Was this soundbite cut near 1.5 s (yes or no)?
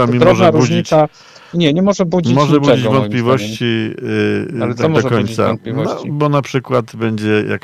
yes